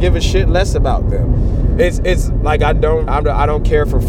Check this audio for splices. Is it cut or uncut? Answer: cut